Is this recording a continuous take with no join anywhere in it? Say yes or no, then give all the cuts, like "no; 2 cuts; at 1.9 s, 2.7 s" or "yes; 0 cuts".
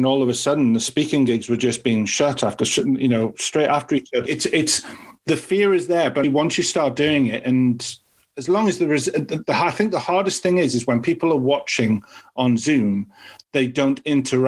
no; 2 cuts; at 4.2 s, 6.2 s